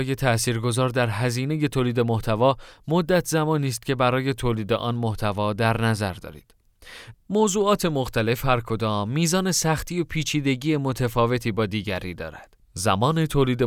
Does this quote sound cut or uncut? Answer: cut